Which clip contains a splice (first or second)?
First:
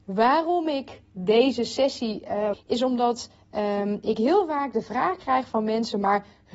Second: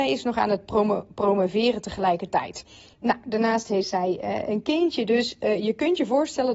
first